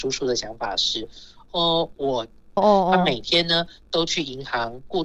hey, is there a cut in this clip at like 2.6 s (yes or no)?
yes